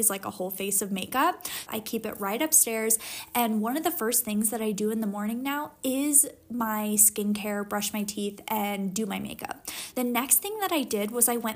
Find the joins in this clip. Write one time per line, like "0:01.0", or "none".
0:01.7
0:09.9

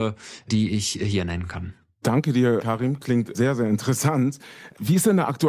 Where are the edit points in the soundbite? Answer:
none

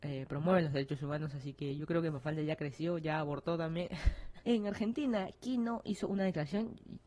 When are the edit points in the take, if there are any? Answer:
0:04.4

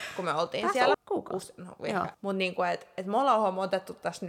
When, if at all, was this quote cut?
0:00.9
0:02.1

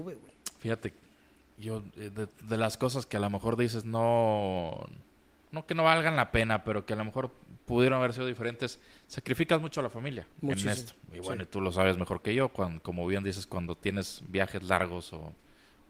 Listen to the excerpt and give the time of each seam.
0:10.3

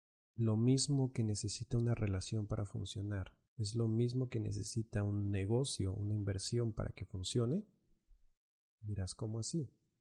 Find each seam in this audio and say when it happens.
0:03.5

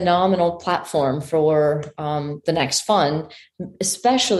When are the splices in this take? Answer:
none

